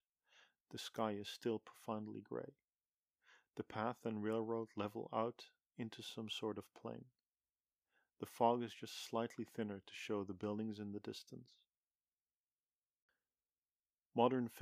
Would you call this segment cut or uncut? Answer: uncut